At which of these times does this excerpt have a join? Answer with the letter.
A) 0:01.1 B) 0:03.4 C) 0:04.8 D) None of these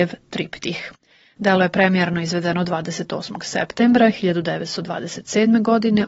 D